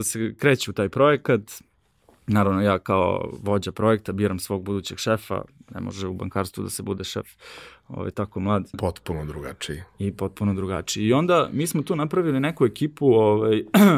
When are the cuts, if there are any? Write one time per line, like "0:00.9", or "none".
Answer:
0:08.7